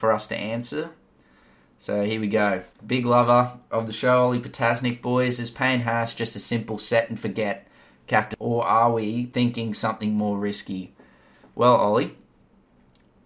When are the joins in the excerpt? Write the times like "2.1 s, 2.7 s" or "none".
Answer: none